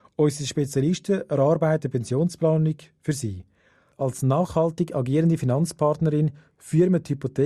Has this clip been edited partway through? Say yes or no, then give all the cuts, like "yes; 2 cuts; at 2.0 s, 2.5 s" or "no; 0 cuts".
no; 0 cuts